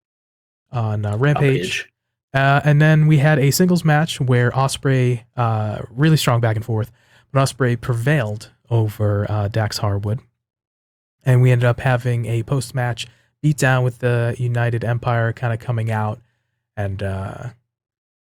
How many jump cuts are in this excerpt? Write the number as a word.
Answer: one